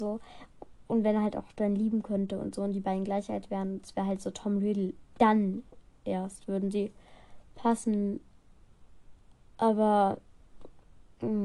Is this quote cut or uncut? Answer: uncut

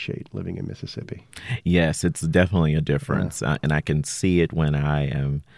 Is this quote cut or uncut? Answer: uncut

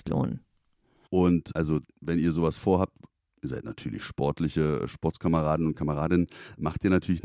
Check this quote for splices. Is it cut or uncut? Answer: cut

